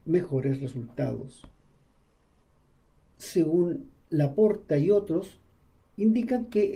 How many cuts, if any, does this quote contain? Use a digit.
0